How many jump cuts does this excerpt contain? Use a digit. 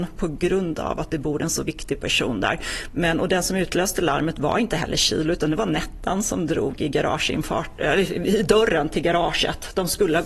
0